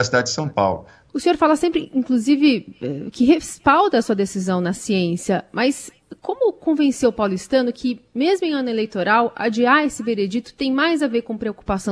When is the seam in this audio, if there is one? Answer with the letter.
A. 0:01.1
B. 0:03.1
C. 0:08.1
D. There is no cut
A